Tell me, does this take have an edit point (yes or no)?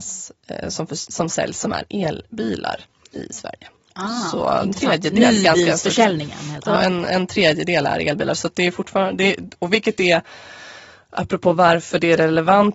yes